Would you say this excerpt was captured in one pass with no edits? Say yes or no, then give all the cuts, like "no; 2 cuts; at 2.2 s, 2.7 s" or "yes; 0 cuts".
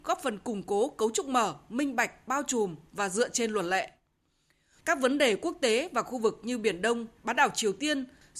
no; 2 cuts; at 4.8 s, 7.2 s